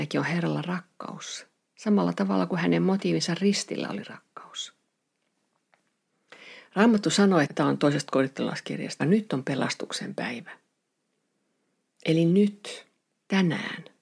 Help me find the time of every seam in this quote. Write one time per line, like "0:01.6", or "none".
0:07.5
0:09.0